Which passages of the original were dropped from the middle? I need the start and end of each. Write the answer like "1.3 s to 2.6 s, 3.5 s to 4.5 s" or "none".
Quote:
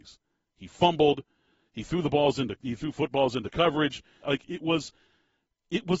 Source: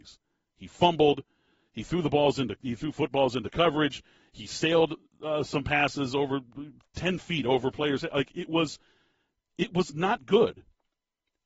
4.2 s to 8.1 s